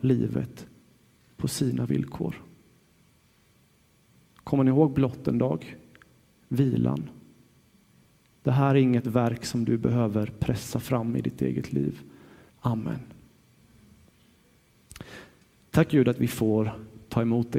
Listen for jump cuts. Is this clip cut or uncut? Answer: cut